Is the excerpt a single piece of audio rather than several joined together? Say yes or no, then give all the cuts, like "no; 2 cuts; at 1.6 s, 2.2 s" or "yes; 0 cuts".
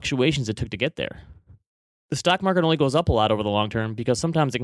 yes; 0 cuts